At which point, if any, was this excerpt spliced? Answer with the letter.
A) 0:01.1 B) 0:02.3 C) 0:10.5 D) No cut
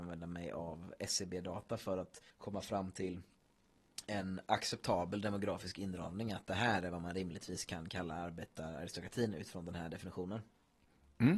B